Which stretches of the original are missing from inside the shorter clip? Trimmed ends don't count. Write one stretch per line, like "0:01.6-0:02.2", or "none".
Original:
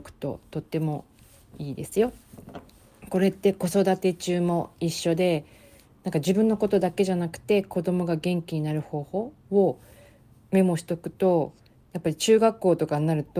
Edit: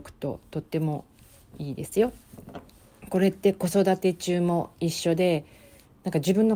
none